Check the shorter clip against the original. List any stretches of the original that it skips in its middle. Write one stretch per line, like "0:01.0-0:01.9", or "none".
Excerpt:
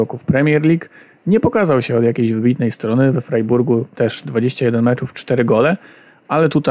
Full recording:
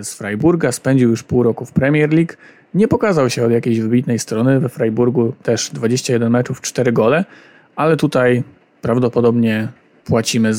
none